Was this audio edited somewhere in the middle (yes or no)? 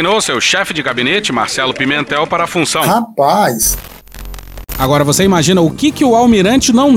no